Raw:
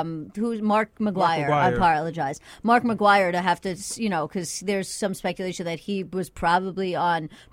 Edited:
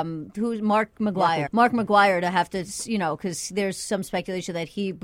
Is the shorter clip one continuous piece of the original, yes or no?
no